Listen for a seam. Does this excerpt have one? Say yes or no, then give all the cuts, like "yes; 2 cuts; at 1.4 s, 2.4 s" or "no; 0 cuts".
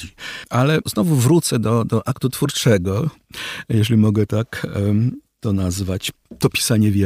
no; 0 cuts